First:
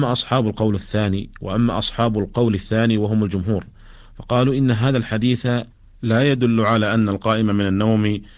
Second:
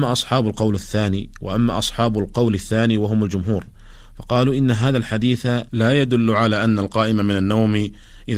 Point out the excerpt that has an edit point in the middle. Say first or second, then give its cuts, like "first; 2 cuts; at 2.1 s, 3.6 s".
second; 1 cut; at 5.7 s